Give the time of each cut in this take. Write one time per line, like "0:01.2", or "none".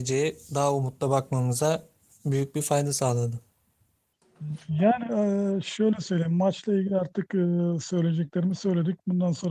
none